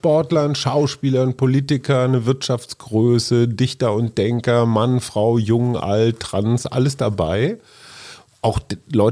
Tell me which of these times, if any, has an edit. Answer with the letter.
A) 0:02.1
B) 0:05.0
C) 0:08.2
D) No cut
D